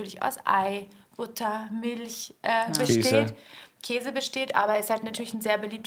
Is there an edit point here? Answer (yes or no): no